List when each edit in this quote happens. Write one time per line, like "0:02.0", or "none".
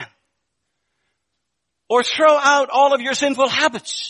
none